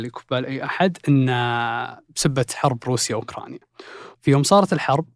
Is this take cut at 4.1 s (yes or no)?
yes